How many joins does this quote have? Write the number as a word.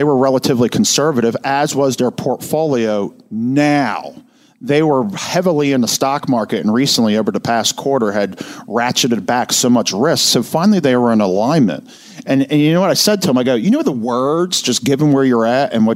zero